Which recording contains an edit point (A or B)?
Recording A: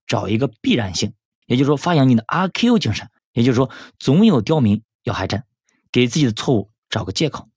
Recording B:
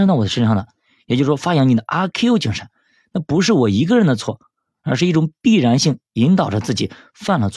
A